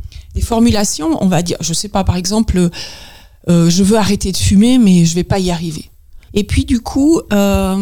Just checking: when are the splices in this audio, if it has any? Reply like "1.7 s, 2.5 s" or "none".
6.3 s